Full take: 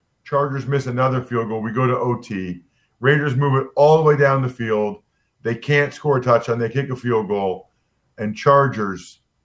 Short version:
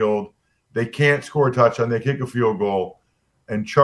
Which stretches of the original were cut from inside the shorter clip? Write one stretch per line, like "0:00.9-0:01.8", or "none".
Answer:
none